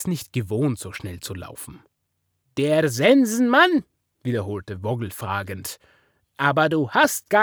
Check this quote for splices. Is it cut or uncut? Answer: cut